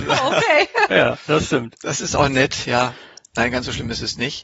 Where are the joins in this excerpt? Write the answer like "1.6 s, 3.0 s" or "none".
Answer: none